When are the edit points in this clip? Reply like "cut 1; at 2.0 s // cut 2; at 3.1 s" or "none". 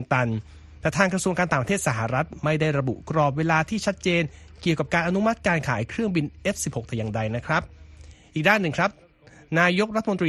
none